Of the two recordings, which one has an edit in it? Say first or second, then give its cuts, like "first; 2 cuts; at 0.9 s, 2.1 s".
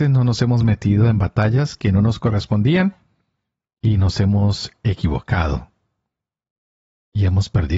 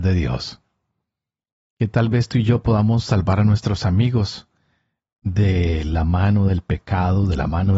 second; 1 cut; at 1.7 s